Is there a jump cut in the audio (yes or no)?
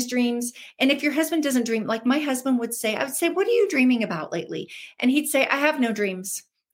no